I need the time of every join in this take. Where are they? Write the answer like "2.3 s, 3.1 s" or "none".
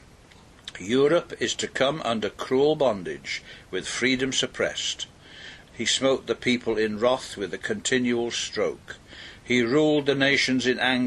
5.7 s